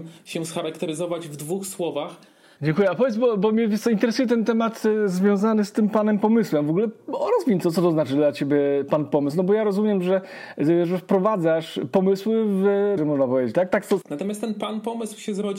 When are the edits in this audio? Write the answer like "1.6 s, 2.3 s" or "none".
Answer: 2.6 s, 13.0 s, 14.0 s